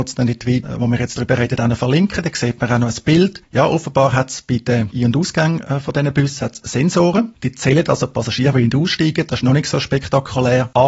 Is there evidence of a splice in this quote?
no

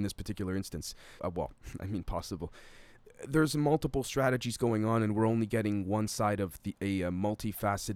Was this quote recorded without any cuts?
no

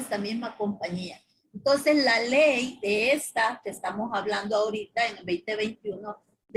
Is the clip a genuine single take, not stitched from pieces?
yes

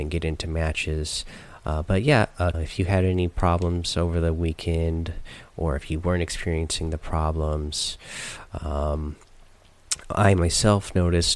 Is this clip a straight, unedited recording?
no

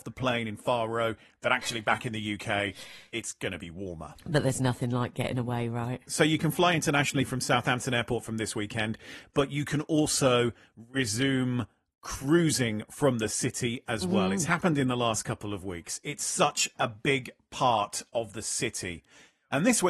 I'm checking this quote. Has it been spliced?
no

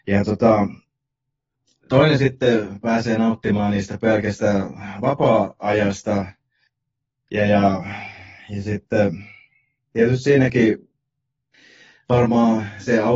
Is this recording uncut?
yes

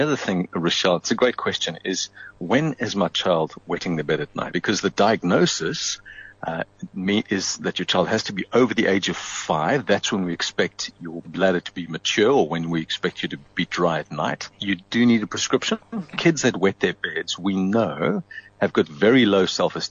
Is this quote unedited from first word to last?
no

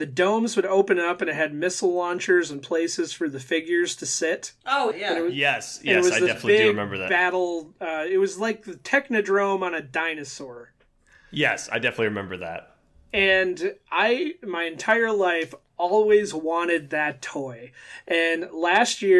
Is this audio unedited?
no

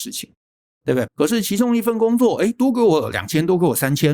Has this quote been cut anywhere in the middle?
yes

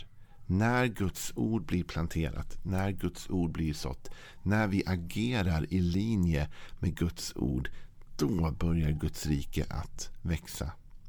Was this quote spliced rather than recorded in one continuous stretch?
no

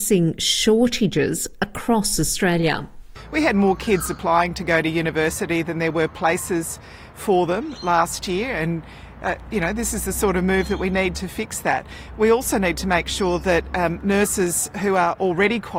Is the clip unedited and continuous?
yes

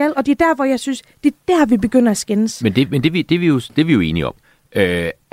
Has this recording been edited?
no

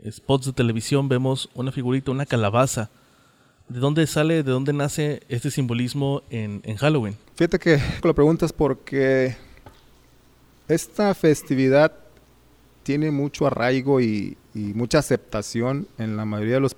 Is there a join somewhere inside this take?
yes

